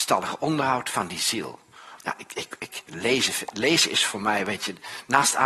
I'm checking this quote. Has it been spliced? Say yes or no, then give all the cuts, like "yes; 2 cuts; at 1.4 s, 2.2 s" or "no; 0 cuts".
yes; 1 cut; at 2.0 s